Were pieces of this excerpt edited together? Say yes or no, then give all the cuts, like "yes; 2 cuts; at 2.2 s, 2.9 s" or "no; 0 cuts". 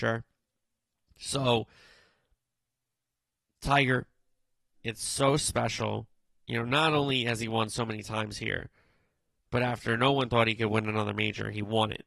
yes; 1 cut; at 4.7 s